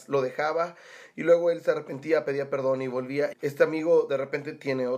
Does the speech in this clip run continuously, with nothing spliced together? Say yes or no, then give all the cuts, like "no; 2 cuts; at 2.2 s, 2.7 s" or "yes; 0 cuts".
no; 1 cut; at 3.3 s